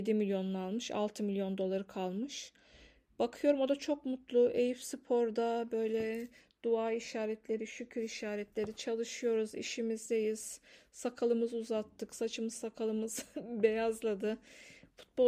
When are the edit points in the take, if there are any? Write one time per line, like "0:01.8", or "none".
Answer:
none